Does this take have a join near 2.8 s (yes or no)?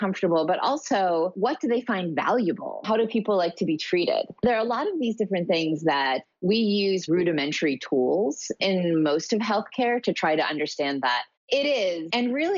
no